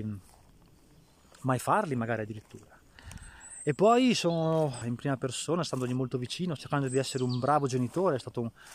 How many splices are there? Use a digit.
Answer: 2